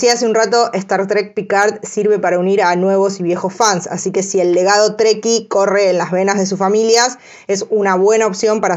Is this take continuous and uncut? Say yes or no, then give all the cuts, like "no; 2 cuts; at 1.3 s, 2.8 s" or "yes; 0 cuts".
yes; 0 cuts